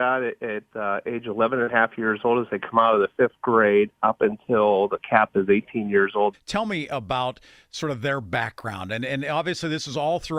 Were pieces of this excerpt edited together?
yes; 1 cut; at 6.3 s

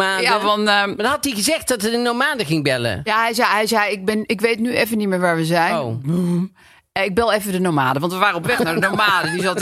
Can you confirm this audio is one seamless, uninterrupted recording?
yes; 0 cuts

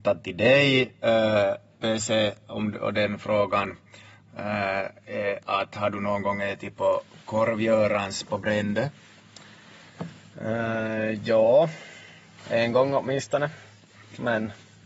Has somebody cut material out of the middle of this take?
no; 0 cuts

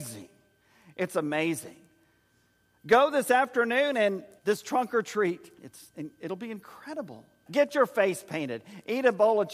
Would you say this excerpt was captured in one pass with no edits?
no; 3 cuts; at 4.4 s, 5.6 s, 7.5 s

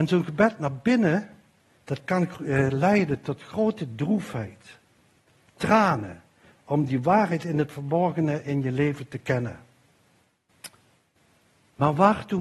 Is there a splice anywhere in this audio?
no; 0 cuts

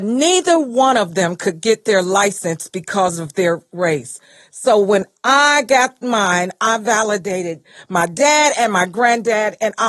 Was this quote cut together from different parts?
no; 0 cuts

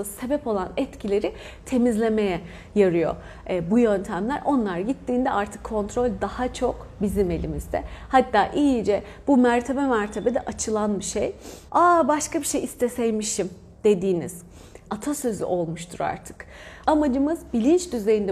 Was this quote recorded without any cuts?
no; 3 cuts; at 11.7 s, 14.9 s, 16.8 s

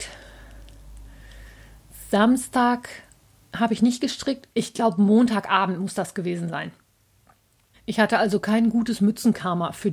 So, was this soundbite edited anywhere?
yes; 2 cuts; at 4.5 s, 7.7 s

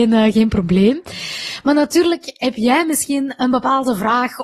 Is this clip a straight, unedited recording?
yes; 0 cuts

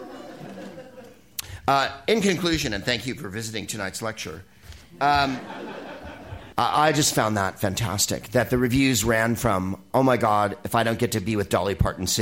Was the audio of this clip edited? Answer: yes; 2 cuts; at 6.5 s, 9.9 s

